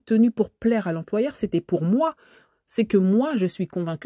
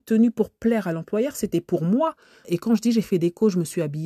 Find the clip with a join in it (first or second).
second